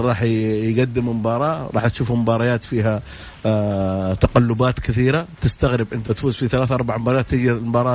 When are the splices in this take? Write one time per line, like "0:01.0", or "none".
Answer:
0:06.0